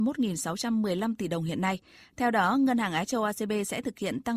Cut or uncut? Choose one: uncut